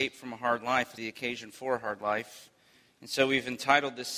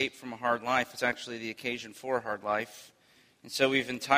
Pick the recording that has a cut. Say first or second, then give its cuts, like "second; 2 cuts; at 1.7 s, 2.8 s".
first; 1 cut; at 1.0 s